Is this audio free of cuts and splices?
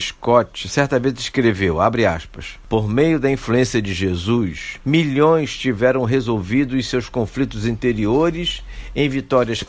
yes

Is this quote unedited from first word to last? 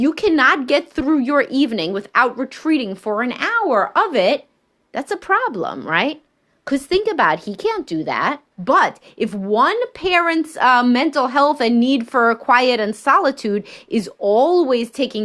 no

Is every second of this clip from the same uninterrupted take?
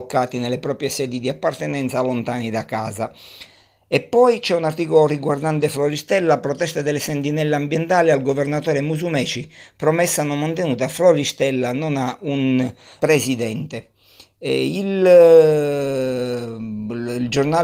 no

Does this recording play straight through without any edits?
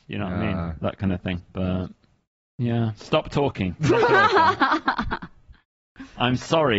no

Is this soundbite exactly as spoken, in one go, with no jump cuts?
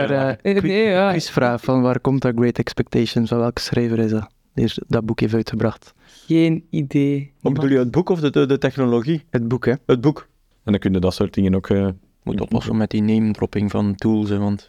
no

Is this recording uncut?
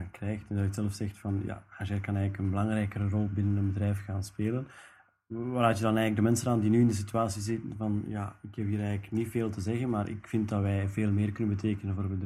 yes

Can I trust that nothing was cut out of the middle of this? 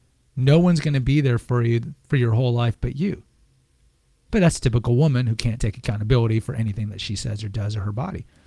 no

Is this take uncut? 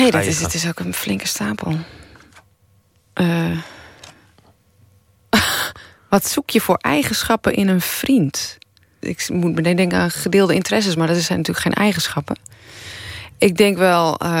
no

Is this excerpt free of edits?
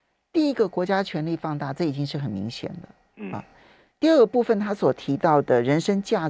yes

